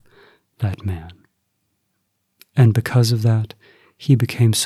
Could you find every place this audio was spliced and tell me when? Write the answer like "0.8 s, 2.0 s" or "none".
2.4 s